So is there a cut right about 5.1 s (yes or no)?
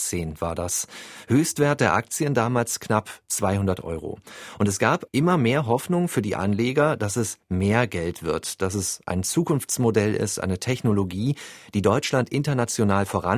yes